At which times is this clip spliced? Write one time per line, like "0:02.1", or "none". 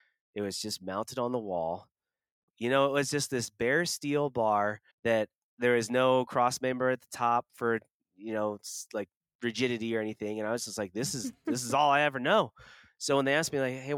0:02.5
0:04.9